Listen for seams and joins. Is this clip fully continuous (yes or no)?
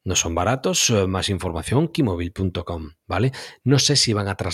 yes